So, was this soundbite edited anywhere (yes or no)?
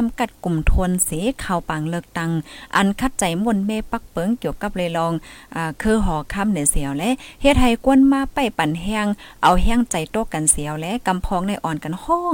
no